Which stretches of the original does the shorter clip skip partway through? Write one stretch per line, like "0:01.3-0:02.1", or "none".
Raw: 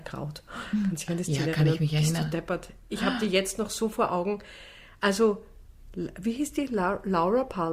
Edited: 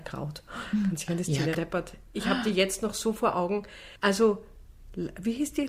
0:01.5-0:02.3
0:04.7-0:05.0